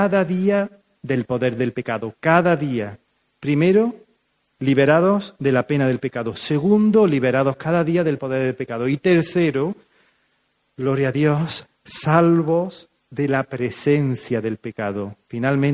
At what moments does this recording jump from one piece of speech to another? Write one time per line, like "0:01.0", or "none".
none